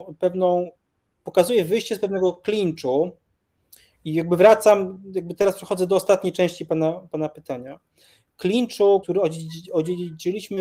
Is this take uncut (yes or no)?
no